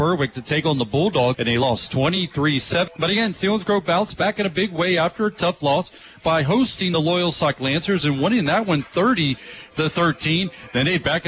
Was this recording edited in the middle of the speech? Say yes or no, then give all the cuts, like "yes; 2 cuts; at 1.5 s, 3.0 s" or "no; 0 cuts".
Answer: yes; 2 cuts; at 1.3 s, 2.9 s